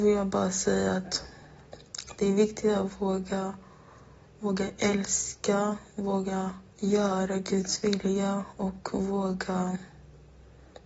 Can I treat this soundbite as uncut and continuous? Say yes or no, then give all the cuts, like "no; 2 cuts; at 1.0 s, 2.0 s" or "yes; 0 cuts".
no; 1 cut; at 6.7 s